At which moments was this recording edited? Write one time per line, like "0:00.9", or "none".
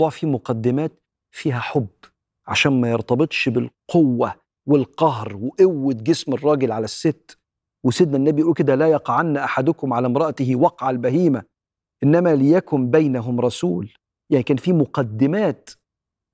none

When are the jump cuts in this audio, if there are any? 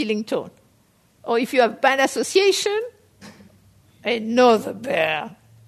0:01.2

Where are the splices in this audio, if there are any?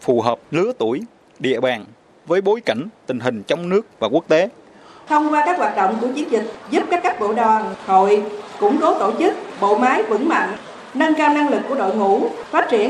0:05.1

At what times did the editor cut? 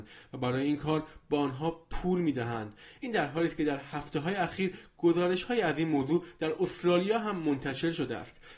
none

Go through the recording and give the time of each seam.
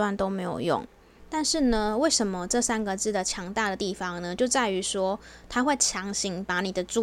0:01.2

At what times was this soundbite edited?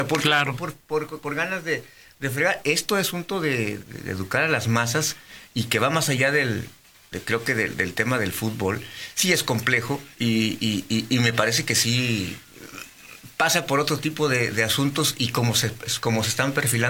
0:01.2
0:03.8
0:10.1

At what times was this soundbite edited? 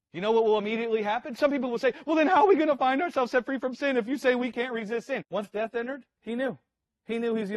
0:05.2

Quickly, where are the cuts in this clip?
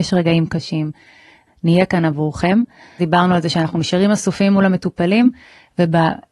0:01.5
0:03.0

